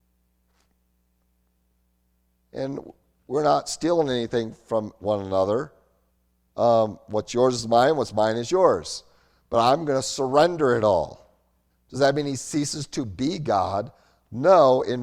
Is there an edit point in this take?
yes; 1 cut; at 11.7 s

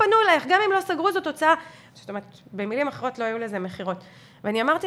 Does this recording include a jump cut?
yes; 1 cut; at 1.9 s

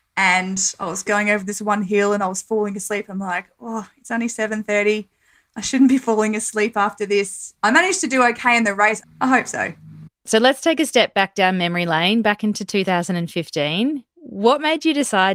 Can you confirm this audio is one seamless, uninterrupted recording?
no; 1 cut; at 9.0 s

